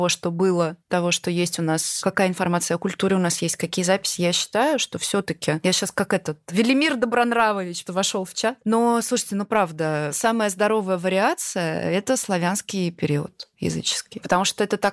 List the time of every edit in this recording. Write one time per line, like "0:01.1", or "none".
0:07.9

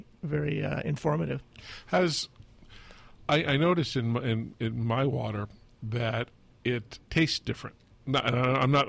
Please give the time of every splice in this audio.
0:07.0

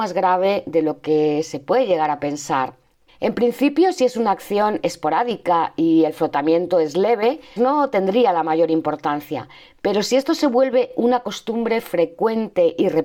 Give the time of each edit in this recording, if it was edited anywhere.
0:03.1
0:07.6

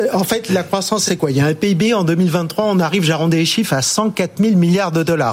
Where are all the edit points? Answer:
none

